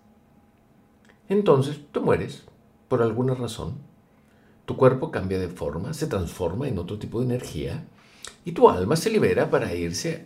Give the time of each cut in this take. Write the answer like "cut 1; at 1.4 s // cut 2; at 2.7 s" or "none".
none